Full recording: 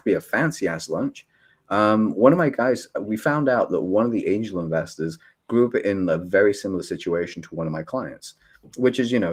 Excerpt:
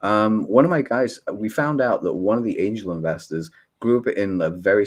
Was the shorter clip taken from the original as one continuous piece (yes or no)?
yes